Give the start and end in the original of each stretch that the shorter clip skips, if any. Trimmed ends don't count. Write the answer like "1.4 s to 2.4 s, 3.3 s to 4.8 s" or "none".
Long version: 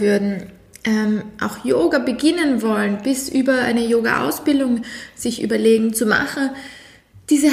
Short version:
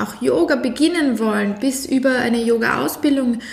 none